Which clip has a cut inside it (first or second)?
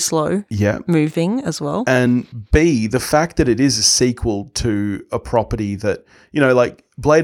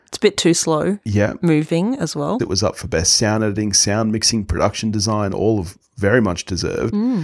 second